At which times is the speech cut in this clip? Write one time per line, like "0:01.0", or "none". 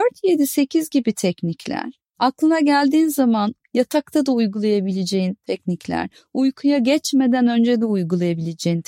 none